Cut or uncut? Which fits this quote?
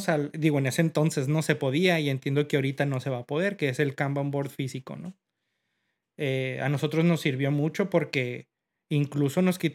uncut